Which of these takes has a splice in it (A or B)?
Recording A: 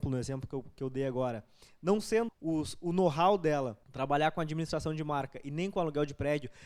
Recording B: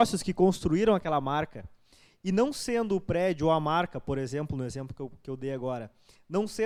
A